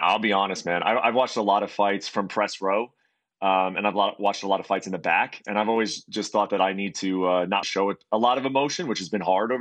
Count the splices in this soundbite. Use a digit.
1